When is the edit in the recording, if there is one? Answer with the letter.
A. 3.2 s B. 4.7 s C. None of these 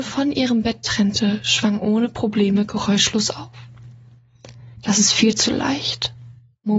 B